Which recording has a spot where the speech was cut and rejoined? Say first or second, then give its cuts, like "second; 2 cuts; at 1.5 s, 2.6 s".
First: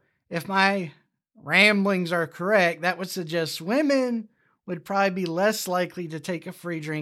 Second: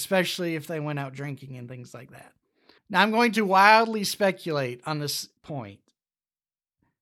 second; 2 cuts; at 2.8 s, 5.4 s